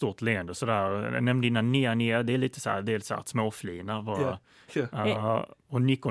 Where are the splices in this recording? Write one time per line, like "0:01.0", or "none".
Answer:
0:04.7